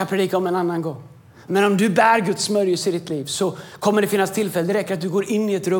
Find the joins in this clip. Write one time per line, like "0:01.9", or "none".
none